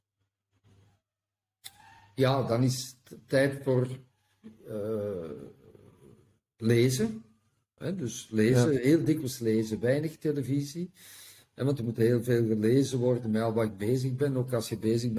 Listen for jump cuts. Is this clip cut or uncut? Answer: uncut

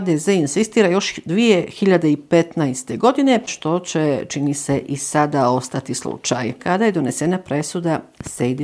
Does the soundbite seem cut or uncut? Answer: cut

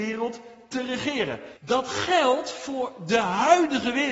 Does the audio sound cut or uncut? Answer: cut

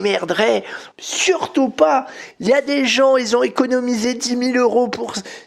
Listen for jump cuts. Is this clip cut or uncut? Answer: cut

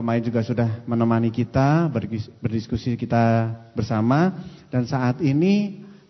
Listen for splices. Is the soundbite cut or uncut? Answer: uncut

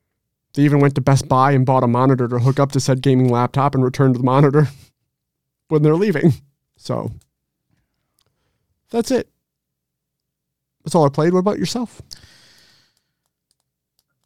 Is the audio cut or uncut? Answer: cut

